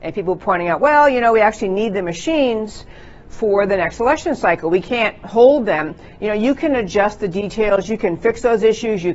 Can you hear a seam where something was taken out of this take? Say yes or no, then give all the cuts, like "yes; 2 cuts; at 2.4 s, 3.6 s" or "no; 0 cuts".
no; 0 cuts